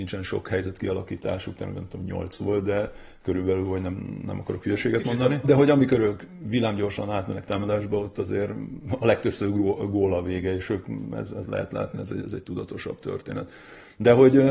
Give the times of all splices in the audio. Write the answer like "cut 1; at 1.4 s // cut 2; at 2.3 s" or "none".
cut 1; at 5.4 s // cut 2; at 11.9 s